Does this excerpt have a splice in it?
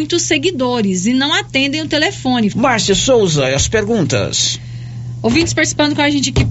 yes; 1 cut; at 2.5 s

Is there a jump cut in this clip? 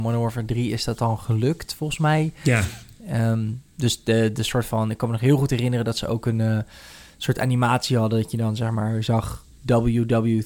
no; 0 cuts

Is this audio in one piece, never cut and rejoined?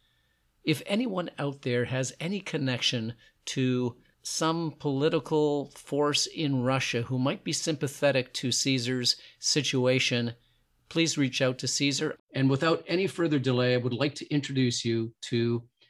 no; 1 cut; at 12.2 s

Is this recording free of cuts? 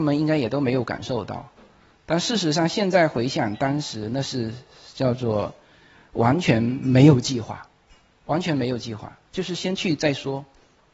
yes; 0 cuts

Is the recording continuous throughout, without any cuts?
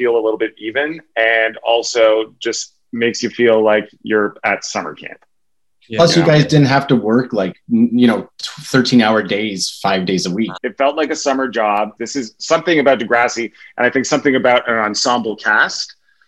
no; 2 cuts; at 10.6 s, 12.0 s

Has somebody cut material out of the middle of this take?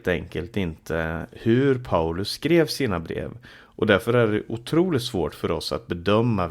no; 0 cuts

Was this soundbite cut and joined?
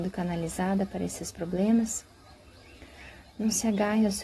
no; 0 cuts

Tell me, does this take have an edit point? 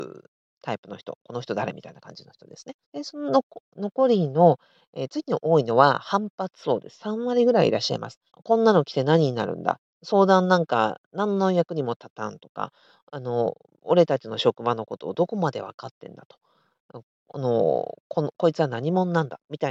yes; 2 cuts; at 2.8 s, 8.3 s

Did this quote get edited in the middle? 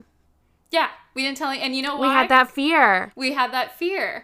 no; 0 cuts

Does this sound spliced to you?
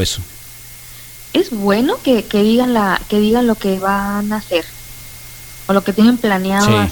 no; 0 cuts

